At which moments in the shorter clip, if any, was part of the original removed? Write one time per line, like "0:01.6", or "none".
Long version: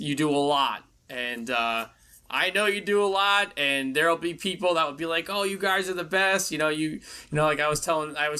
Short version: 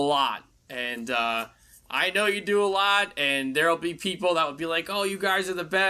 none